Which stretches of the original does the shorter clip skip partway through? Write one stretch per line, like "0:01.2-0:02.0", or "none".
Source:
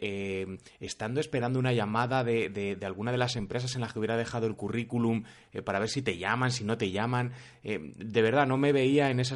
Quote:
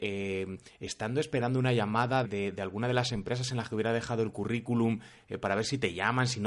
0:02.2-0:02.5